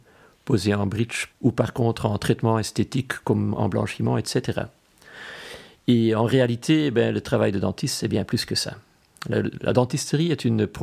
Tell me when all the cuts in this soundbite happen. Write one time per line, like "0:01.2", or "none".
0:01.3